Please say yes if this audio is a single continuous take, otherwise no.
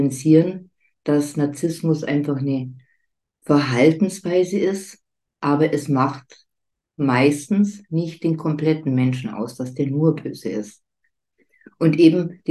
yes